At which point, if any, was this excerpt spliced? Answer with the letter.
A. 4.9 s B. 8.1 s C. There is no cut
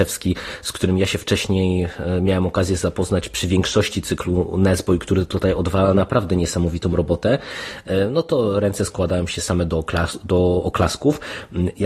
C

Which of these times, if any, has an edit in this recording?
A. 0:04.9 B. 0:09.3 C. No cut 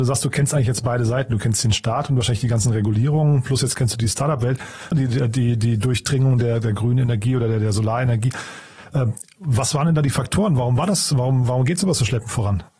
A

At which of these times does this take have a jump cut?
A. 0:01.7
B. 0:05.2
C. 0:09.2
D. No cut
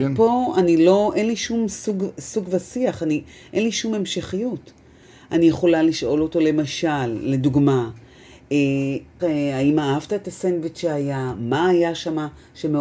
C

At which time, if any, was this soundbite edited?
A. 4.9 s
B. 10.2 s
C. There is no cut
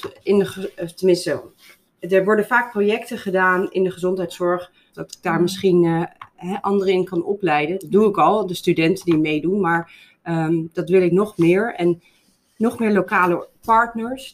A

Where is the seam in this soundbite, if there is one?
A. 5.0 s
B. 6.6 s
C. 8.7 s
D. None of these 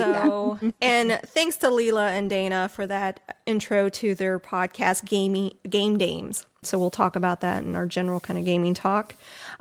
B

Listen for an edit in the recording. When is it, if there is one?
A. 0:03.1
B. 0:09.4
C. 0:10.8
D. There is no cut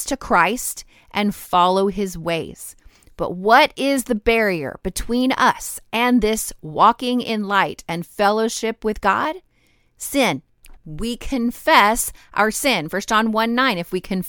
C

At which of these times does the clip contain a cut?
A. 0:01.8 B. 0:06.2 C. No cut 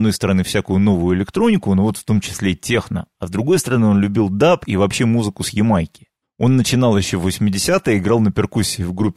B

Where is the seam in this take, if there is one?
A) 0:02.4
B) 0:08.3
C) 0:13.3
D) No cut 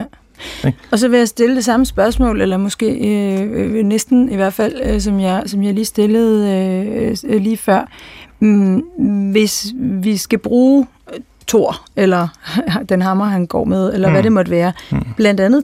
D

